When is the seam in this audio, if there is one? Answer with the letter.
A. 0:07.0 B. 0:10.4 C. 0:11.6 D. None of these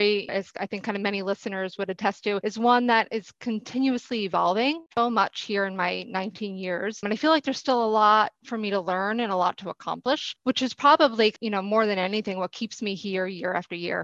D